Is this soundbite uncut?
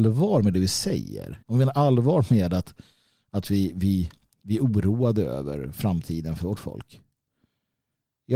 no; 1 cut; at 1.4 s

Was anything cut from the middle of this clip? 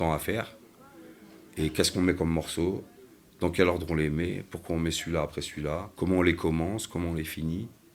yes; 1 cut; at 5.9 s

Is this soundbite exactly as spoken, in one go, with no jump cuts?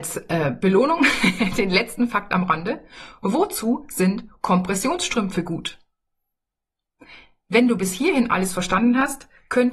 yes; 0 cuts

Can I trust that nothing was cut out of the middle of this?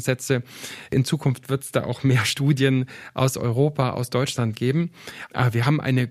yes; 0 cuts

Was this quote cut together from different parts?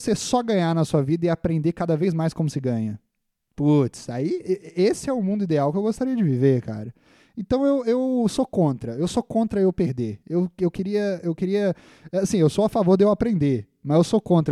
no; 0 cuts

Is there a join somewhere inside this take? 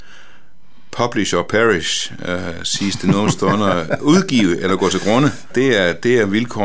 yes; 1 cut; at 5.5 s

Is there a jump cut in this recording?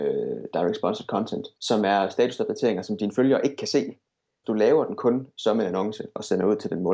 yes; 2 cuts; at 1.5 s, 4.4 s

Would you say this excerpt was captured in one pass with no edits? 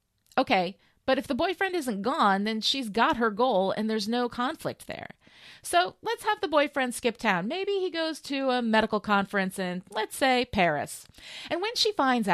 yes; 0 cuts

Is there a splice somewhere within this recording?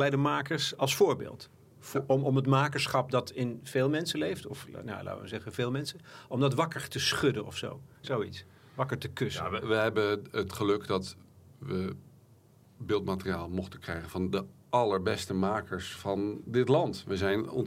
no; 0 cuts

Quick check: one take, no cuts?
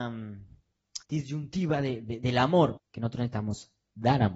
no; 2 cuts; at 1.0 s, 2.8 s

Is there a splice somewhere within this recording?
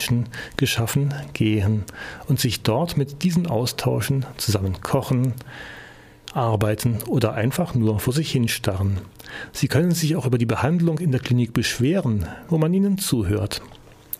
yes; 1 cut; at 12.5 s

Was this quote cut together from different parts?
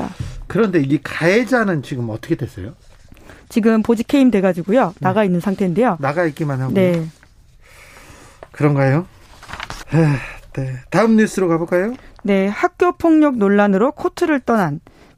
yes; 1 cut; at 9.8 s

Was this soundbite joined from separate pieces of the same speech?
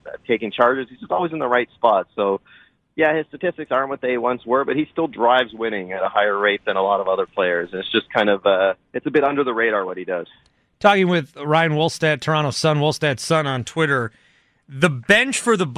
no; 0 cuts

